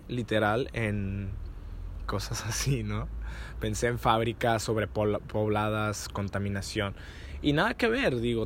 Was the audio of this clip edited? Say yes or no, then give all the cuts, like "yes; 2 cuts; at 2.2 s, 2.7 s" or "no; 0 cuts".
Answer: yes; 1 cut; at 2.0 s